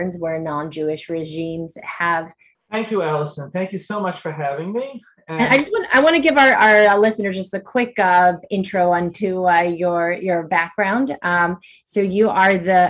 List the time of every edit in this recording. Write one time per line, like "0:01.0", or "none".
0:02.5